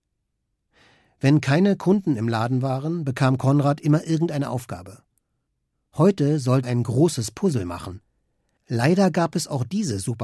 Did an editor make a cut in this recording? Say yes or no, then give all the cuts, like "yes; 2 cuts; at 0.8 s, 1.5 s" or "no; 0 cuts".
yes; 2 cuts; at 6.6 s, 8.6 s